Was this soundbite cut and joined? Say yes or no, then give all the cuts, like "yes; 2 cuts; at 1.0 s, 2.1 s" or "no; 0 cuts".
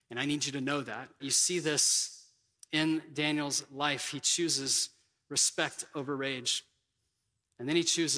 yes; 1 cut; at 1.2 s